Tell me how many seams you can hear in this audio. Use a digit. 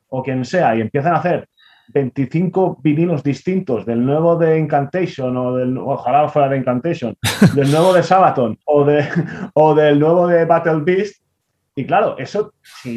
1